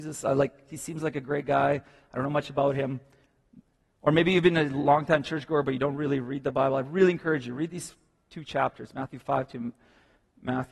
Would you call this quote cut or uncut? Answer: uncut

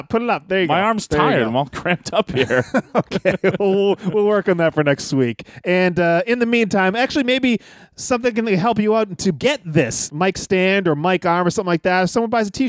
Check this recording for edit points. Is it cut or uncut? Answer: uncut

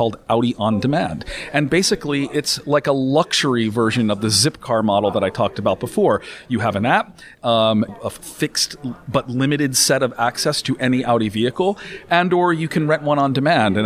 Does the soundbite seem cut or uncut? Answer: cut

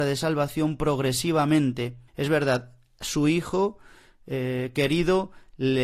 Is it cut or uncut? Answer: cut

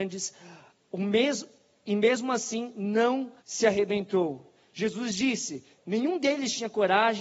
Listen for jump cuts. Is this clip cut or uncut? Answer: cut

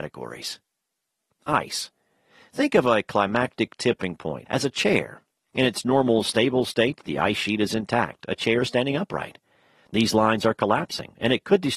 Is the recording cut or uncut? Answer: cut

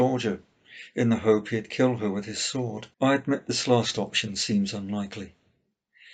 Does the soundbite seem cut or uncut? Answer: cut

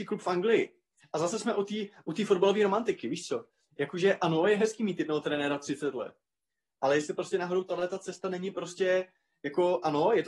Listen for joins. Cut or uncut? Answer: cut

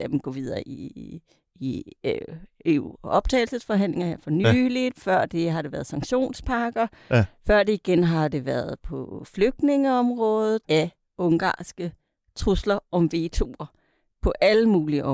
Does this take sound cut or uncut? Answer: cut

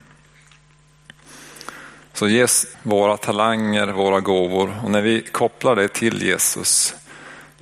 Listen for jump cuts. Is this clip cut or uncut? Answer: cut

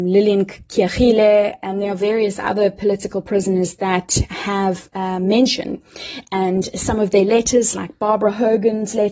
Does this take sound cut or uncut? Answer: uncut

